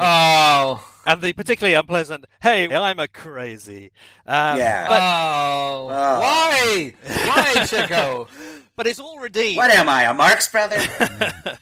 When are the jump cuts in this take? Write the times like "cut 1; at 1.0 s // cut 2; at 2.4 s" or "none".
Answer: cut 1; at 2.7 s

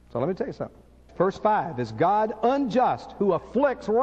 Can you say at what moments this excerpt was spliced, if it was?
cut 1; at 1.1 s

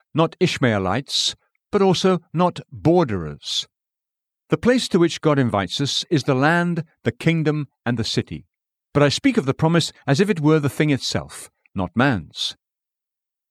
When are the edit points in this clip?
cut 1; at 8.7 s // cut 2; at 11.7 s

